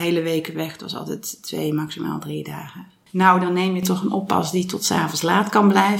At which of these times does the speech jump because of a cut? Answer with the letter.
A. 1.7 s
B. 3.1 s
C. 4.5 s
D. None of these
B